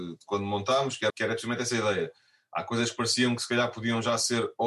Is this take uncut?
no; 1 cut; at 1.1 s

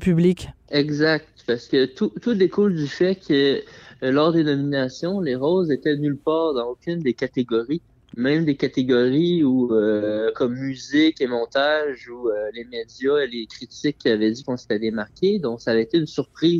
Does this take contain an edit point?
no; 0 cuts

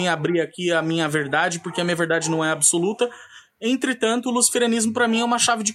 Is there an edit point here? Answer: no; 0 cuts

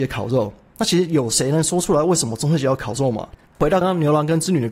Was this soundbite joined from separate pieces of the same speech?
yes; 1 cut; at 3.8 s

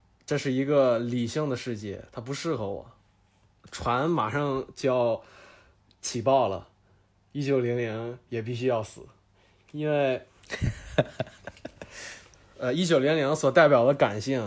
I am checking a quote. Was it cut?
no; 0 cuts

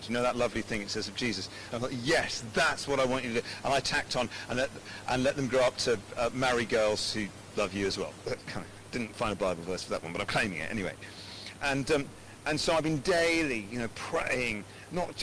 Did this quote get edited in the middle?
yes; 2 cuts; at 1.7 s, 5.0 s

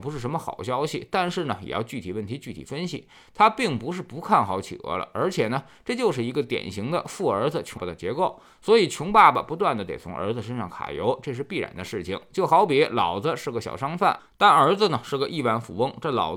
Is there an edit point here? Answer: yes; 1 cut; at 7.8 s

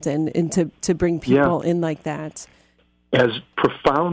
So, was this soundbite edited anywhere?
no; 0 cuts

